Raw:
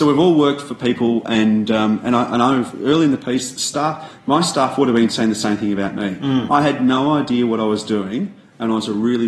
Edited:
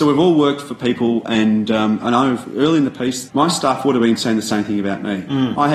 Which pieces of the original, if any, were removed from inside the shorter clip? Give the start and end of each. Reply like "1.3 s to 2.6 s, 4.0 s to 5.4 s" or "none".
2.0 s to 2.3 s, 3.5 s to 4.2 s